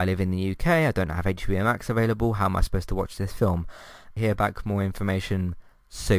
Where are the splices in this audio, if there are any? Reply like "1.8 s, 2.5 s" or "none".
4.2 s